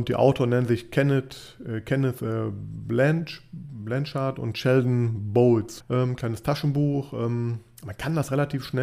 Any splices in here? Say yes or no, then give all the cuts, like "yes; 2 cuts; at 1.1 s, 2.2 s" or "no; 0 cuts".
yes; 1 cut; at 5.8 s